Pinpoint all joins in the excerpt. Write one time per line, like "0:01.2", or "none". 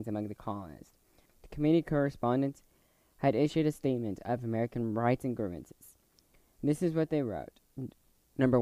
0:01.3